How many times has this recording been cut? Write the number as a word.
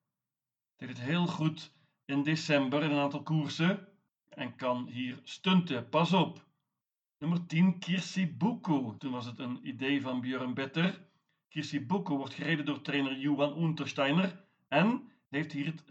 one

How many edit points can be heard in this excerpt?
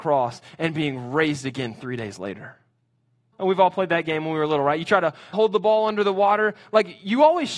two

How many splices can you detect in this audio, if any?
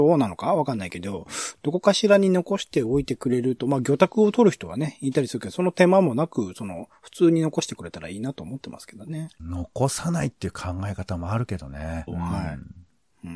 two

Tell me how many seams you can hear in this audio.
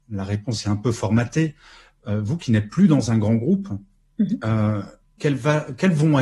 one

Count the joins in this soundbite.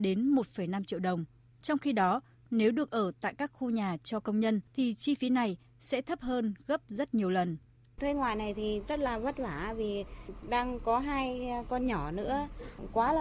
one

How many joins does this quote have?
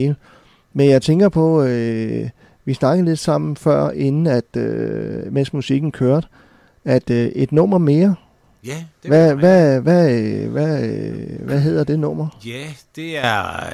one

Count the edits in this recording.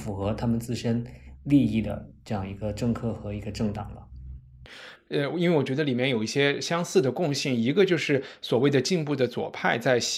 one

